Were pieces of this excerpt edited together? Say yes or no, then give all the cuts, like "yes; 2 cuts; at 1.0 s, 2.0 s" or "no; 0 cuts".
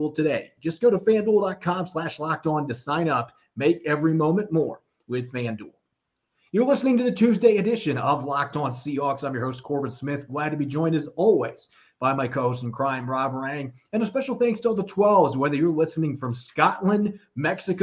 no; 0 cuts